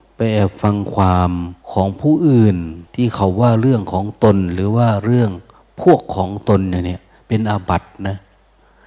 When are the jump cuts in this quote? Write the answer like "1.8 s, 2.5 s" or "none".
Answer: 1.6 s, 2.9 s